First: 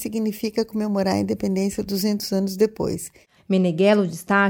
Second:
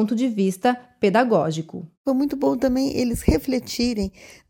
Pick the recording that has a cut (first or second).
first